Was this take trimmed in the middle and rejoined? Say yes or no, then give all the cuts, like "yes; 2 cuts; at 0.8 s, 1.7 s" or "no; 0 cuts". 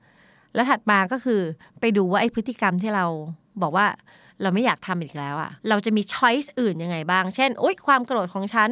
yes; 1 cut; at 5.6 s